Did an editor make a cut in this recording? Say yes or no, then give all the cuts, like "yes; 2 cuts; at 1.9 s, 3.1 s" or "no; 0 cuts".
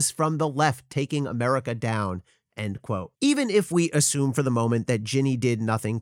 yes; 1 cut; at 3.2 s